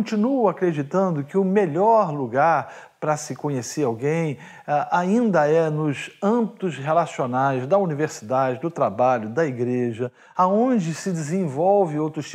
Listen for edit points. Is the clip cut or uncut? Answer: uncut